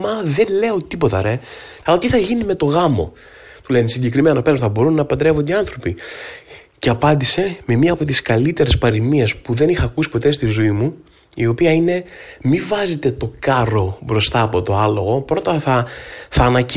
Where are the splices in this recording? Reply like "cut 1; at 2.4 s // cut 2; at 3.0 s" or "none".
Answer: cut 1; at 1.8 s // cut 2; at 4.6 s